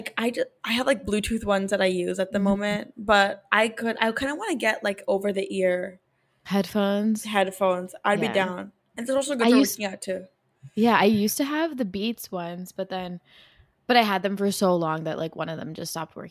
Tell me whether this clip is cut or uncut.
uncut